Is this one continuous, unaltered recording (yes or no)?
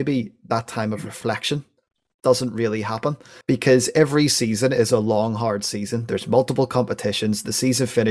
no